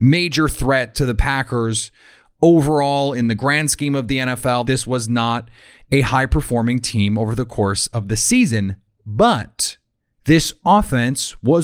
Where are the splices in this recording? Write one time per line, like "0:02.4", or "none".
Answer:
0:04.6